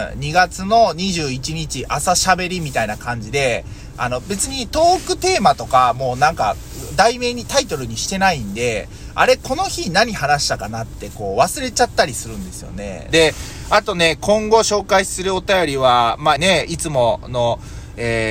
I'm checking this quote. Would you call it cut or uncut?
cut